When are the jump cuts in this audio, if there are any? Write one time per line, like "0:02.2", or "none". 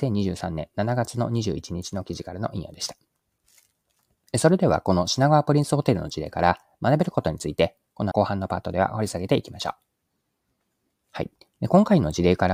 0:08.1